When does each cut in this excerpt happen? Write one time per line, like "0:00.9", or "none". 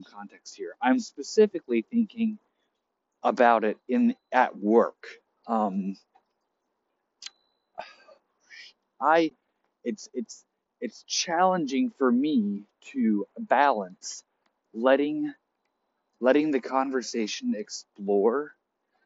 0:05.3

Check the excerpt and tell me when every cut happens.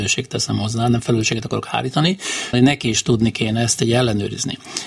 0:02.5

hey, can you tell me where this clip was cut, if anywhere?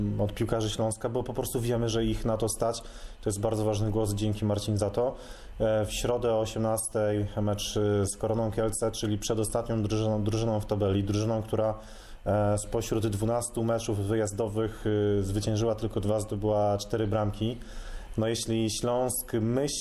none

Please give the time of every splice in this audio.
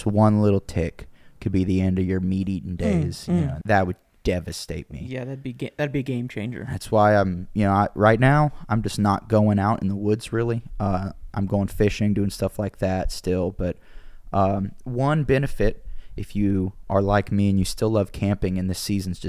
0:03.6

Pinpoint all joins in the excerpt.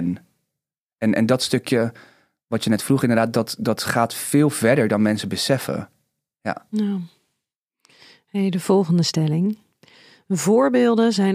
none

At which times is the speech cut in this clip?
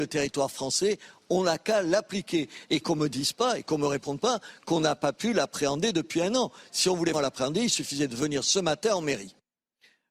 0:07.1

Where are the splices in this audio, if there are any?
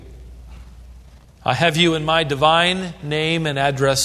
0:01.2

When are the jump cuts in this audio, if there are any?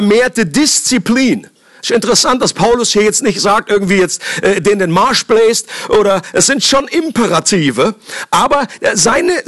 none

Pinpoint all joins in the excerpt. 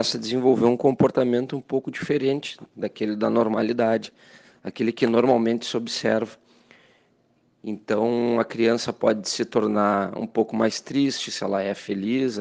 none

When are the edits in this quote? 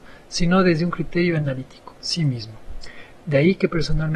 0:03.2

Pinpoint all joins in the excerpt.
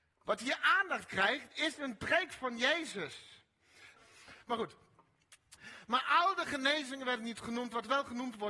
0:04.0

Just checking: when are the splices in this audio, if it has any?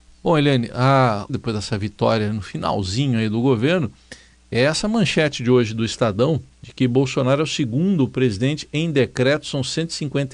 0:01.3
0:06.5

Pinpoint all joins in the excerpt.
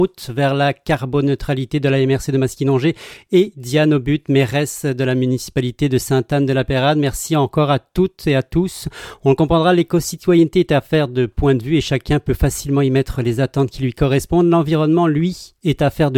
none

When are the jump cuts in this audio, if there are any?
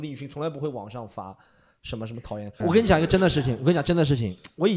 0:02.6

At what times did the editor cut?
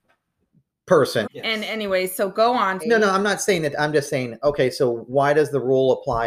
0:01.2
0:02.8

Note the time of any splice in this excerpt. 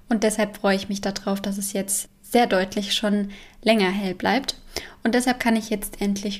0:02.0

